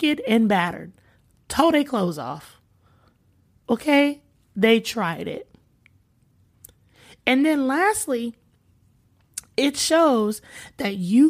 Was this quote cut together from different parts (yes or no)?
no